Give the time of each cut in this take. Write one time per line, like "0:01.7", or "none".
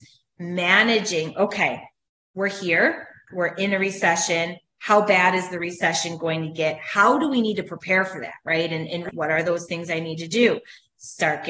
0:03.3
0:09.1